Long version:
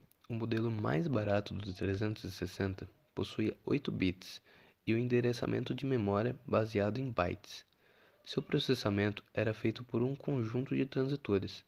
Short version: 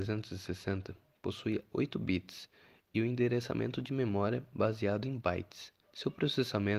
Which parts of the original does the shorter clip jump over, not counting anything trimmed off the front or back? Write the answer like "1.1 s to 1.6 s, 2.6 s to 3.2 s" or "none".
7.7 s to 8.1 s